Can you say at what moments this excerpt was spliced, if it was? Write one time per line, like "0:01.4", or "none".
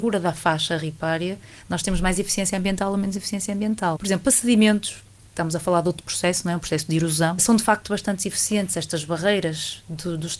0:04.0
0:07.4